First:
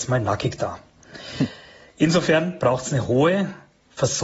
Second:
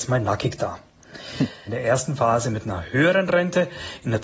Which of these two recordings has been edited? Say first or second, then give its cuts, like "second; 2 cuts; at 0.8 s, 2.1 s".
second; 1 cut; at 1.7 s